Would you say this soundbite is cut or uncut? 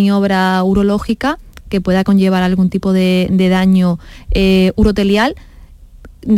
uncut